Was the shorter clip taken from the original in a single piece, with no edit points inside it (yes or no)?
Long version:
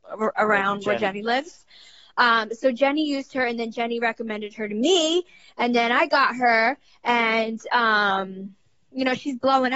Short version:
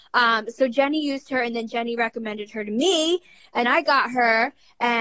no